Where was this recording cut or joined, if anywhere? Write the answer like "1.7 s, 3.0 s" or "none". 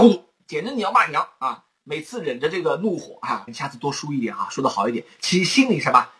3.5 s